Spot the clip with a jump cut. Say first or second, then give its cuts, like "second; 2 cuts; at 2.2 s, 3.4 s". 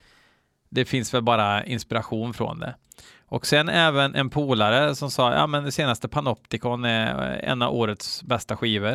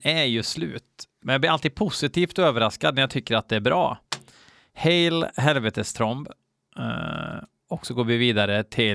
second; 1 cut; at 1.2 s